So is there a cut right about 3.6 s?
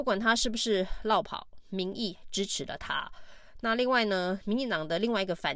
no; 0 cuts

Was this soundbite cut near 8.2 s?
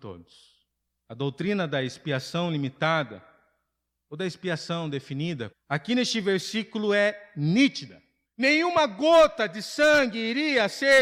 yes; 2 cuts; at 5.5 s, 8.2 s

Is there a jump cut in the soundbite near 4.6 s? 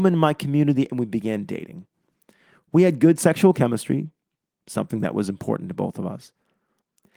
yes; 1 cut; at 4.6 s

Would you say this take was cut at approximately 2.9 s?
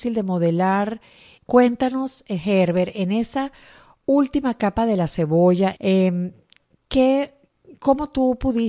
no; 2 cuts; at 1.4 s, 5.8 s

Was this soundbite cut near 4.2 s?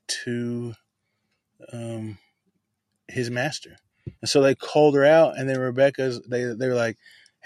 yes; 1 cut; at 4.2 s

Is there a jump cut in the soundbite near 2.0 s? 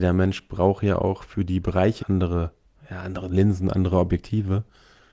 yes; 1 cut; at 2.0 s

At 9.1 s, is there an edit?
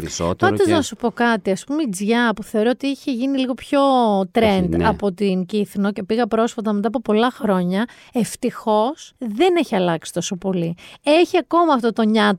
yes; 1 cut; at 9.1 s

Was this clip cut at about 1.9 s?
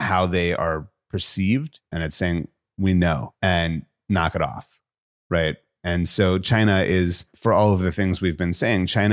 yes; 1 cut; at 1.9 s

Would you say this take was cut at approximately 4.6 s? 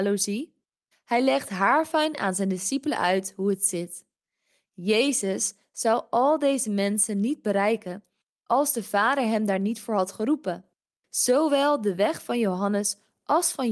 no; 1 cut; at 0.9 s

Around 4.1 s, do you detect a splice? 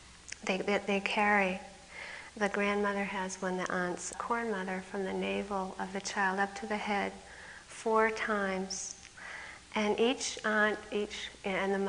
yes; 1 cut; at 4.1 s

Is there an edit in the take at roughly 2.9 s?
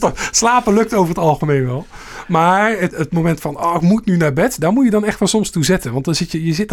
yes; 1 cut; at 2.9 s

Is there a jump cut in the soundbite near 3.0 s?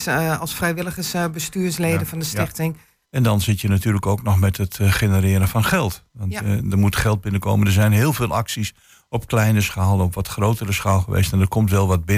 yes; 1 cut; at 3.0 s

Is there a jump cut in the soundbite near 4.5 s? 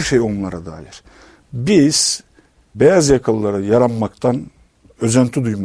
no; 0 cuts

